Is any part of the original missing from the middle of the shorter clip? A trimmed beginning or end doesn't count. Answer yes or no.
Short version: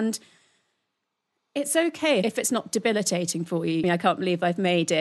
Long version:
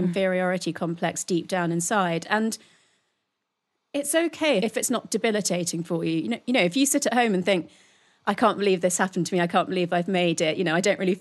yes